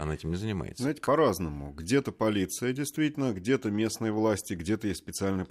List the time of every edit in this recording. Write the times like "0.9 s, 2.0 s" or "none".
none